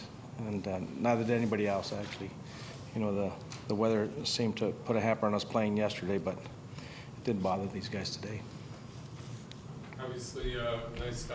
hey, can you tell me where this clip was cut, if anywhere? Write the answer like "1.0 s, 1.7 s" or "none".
none